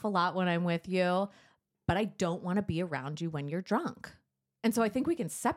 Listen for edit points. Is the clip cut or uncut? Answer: uncut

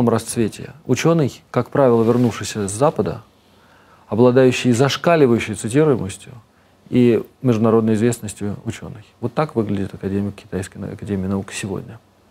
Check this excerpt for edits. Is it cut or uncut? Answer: uncut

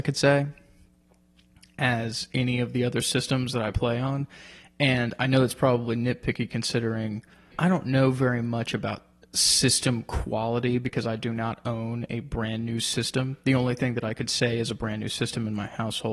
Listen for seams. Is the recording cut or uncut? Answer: cut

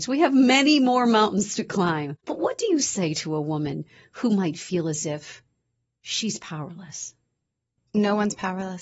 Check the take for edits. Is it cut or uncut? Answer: cut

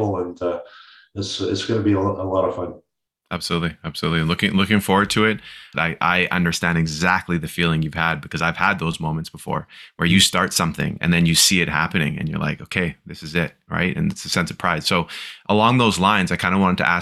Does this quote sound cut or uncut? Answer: cut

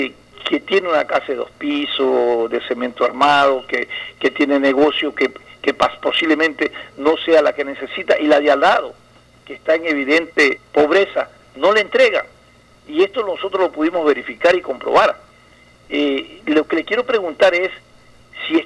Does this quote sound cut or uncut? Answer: uncut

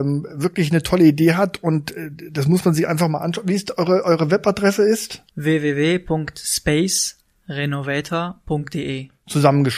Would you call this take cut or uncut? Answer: cut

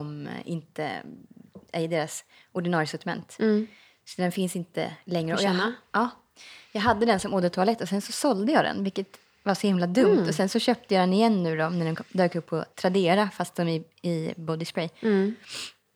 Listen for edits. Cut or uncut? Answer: uncut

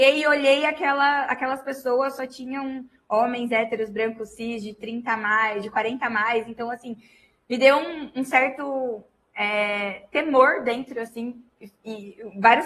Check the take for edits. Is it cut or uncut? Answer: uncut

